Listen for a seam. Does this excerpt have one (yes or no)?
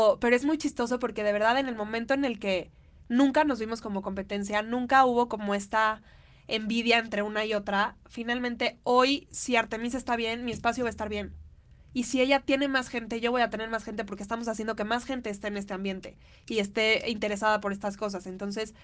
no